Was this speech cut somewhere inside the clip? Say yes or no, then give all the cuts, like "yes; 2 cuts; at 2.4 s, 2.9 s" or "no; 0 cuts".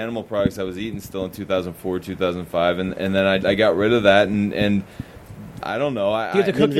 yes; 2 cuts; at 3.4 s, 5.6 s